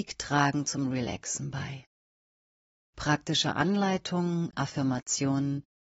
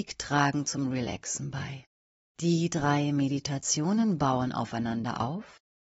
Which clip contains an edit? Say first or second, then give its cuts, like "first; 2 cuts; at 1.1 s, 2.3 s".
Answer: second; 1 cut; at 2.2 s